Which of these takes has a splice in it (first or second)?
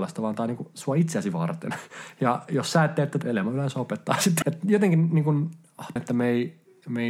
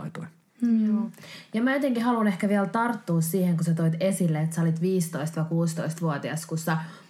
first